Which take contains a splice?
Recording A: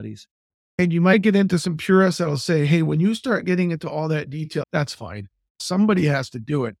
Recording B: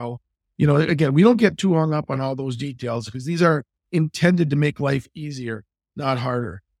A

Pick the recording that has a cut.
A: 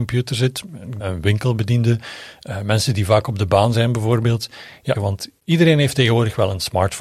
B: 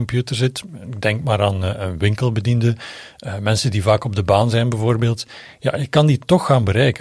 A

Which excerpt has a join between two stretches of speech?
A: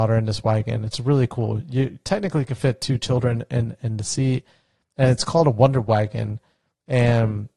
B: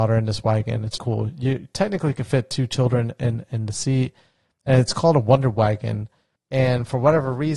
B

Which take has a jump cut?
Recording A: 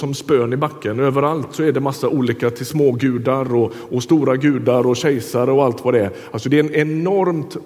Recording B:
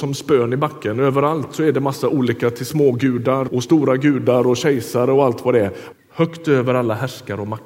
B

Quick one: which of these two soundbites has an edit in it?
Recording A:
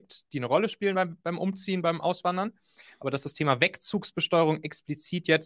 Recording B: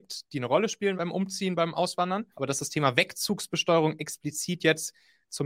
B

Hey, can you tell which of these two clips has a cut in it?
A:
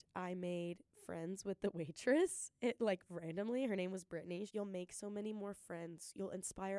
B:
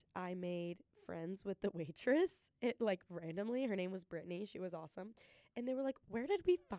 A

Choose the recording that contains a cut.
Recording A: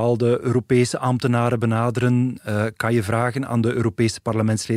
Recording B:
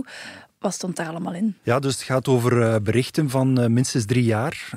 B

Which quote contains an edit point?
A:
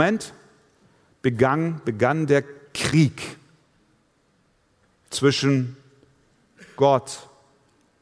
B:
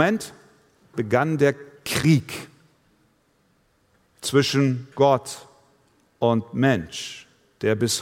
B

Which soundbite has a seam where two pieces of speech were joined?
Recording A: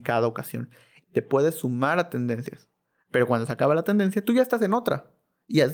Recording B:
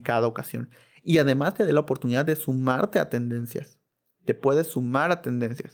A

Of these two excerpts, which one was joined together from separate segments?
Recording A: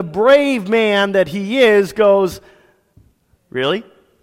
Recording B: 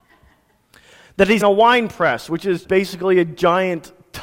B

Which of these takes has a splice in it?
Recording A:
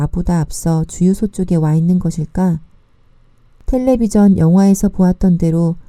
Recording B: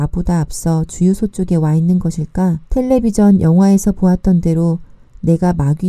B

